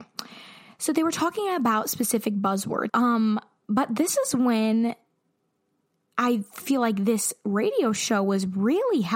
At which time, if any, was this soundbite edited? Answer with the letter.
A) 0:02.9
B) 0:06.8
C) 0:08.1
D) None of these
A